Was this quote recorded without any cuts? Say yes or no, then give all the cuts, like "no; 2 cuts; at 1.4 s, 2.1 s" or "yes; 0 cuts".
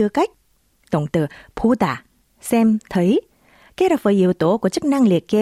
yes; 0 cuts